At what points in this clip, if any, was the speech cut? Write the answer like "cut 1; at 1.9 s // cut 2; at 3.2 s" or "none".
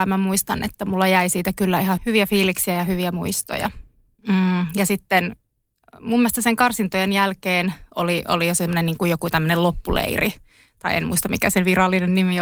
cut 1; at 2.0 s // cut 2; at 4.2 s